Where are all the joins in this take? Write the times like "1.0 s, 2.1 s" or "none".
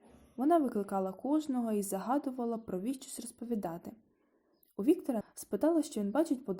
5.2 s

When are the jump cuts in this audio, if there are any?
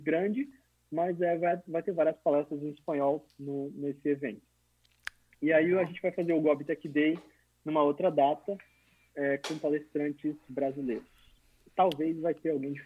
none

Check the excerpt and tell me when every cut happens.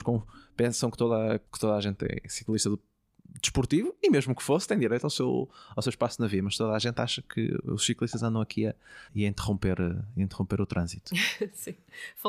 1.5 s, 9.1 s

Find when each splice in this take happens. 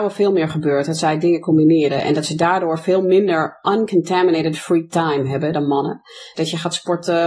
6.3 s

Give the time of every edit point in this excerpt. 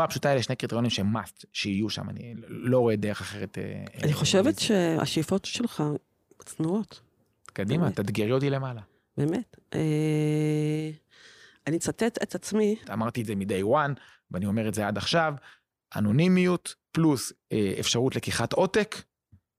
6.4 s, 12.8 s, 16.8 s

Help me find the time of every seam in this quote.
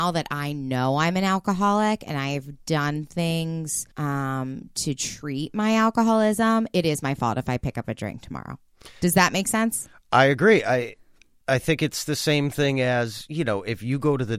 3.9 s

